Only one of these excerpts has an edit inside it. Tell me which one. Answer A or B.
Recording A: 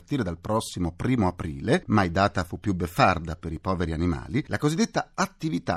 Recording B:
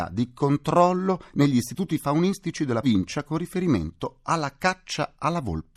B